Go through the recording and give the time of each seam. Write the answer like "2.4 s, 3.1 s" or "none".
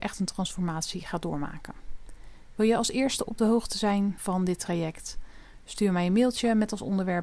none